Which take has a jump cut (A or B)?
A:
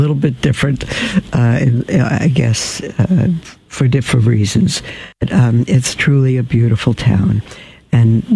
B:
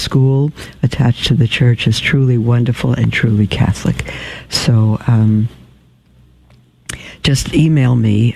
A